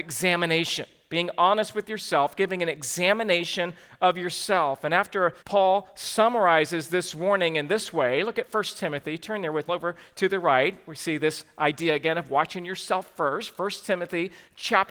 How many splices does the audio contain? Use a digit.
2